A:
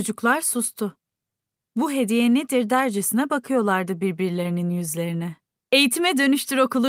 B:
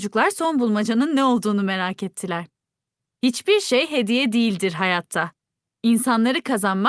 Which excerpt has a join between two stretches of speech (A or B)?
A